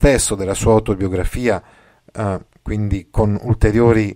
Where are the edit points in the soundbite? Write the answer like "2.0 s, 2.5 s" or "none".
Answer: none